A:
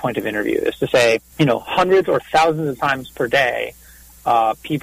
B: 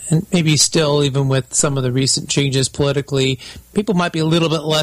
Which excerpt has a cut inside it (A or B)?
A